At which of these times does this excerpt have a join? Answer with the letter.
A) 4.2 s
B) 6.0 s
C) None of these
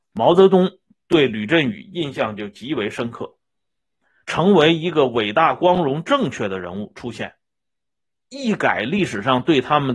A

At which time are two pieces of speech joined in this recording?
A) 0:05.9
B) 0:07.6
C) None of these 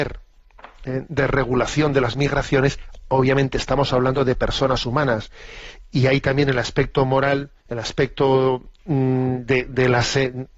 B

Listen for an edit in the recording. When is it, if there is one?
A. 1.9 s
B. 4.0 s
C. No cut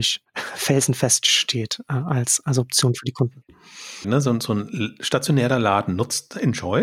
B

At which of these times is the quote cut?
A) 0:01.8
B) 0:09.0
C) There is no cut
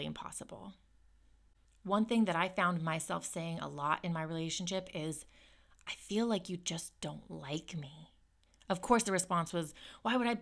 C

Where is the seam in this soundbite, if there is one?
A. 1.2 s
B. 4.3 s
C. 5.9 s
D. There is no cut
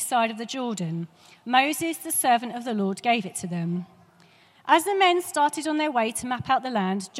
D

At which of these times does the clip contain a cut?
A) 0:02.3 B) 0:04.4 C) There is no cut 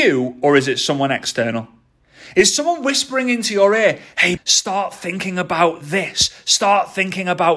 B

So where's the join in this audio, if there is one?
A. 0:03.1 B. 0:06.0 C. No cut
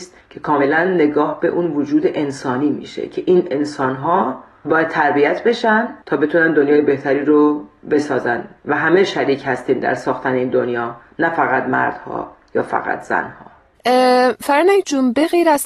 B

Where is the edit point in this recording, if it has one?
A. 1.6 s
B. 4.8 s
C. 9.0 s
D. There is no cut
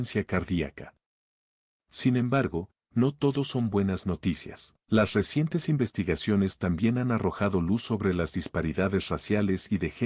B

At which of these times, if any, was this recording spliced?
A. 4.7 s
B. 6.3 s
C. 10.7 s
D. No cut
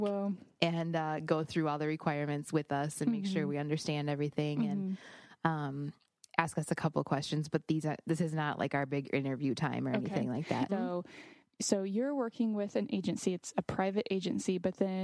C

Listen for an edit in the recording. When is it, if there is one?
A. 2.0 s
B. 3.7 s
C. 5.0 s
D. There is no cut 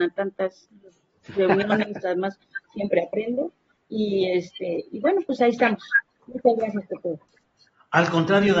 A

